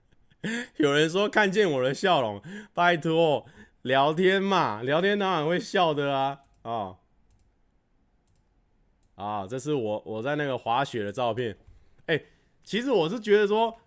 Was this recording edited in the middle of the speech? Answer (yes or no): no